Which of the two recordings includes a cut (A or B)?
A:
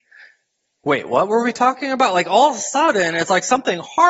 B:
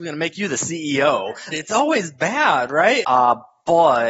B